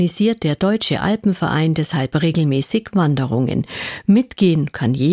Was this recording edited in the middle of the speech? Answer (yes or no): no